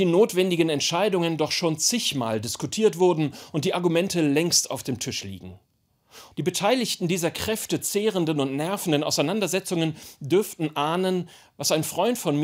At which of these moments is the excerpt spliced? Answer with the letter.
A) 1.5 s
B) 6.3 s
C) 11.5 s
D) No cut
B